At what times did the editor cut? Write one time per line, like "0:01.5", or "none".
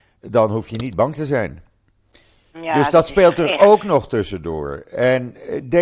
none